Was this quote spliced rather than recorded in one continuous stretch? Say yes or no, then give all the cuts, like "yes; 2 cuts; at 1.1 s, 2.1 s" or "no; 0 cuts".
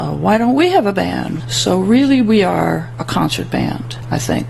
yes; 1 cut; at 1.4 s